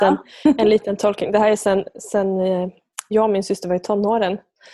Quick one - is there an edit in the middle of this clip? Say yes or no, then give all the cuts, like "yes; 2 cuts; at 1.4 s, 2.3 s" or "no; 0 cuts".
no; 0 cuts